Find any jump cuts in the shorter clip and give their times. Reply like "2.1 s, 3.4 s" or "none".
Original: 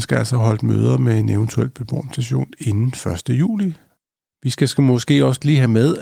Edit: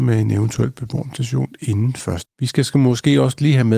2.2 s

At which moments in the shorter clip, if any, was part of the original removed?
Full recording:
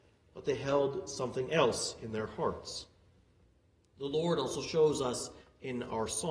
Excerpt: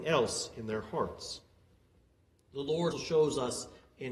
2.9 s

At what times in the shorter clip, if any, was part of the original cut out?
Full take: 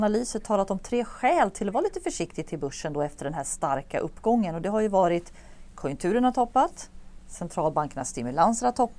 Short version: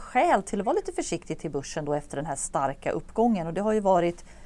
none

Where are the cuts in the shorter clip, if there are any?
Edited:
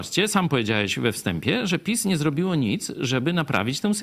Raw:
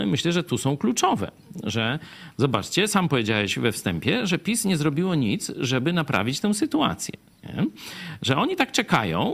none

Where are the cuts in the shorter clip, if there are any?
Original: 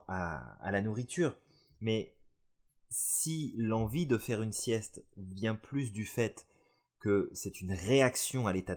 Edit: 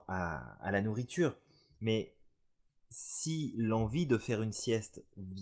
none

